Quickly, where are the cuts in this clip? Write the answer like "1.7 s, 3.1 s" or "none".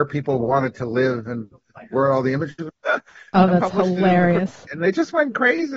2.7 s, 4.7 s